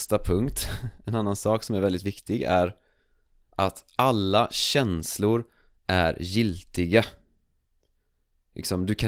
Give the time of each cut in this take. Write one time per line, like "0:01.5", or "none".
none